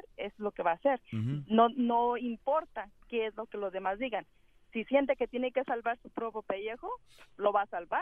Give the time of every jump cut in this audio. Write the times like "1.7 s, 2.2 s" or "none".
none